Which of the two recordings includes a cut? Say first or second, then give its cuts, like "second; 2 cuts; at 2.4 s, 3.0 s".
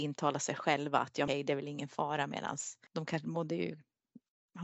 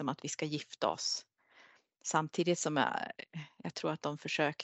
first; 2 cuts; at 1.3 s, 2.9 s